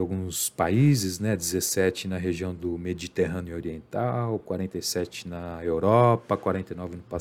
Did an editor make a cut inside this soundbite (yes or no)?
no